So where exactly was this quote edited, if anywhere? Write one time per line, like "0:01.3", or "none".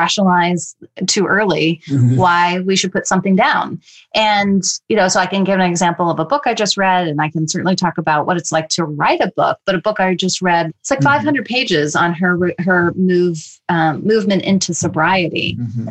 0:10.7